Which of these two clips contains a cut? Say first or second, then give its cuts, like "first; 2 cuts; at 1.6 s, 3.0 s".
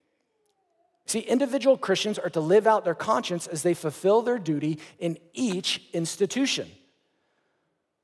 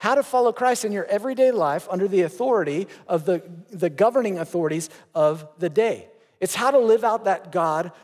first; 1 cut; at 1.1 s